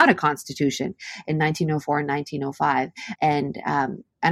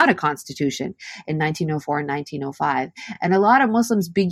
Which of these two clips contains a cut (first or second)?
first